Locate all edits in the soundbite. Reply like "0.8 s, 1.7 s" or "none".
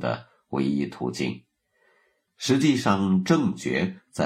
2.3 s